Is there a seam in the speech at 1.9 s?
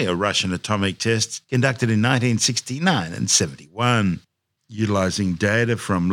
no; 1 cut; at 4.6 s

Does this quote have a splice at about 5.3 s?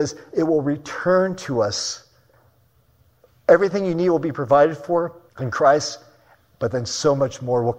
yes; 1 cut; at 5.3 s

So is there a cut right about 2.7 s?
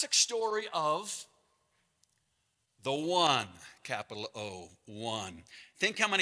no; 0 cuts

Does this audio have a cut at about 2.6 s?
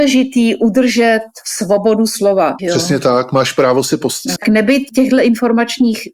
yes; 2 cuts; at 2.6 s, 4.4 s

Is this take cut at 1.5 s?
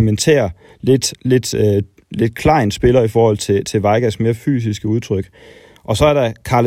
no; 0 cuts

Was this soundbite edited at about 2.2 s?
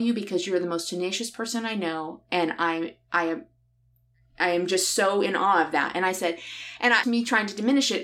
no; 1 cut; at 7.0 s

